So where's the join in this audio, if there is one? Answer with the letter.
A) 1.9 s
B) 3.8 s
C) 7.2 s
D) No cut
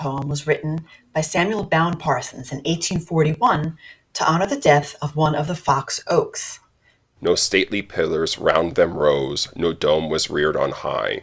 C